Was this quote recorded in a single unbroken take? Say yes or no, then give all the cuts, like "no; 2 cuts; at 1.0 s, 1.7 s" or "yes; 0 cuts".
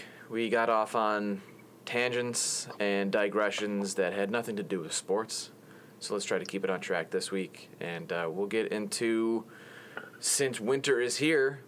yes; 0 cuts